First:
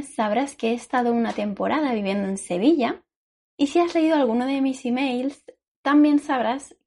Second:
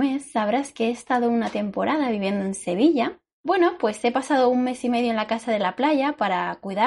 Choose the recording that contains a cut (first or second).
second